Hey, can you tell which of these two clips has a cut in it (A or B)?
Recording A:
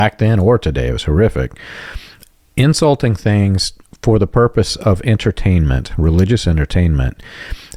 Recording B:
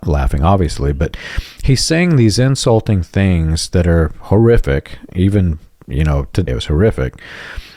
B